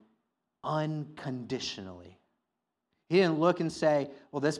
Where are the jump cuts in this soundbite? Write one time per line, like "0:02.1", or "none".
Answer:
0:02.9